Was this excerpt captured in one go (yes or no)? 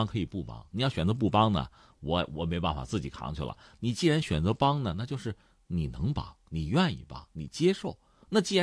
yes